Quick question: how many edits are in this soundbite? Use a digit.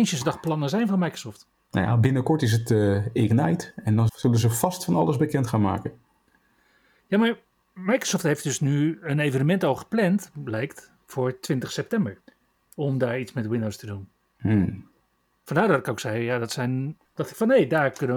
1